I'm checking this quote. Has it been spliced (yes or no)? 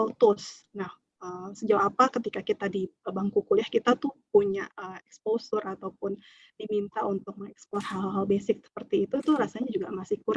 no